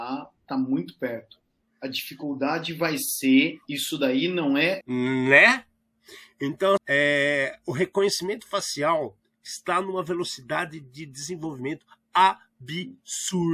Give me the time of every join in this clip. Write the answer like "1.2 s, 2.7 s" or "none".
4.8 s, 6.8 s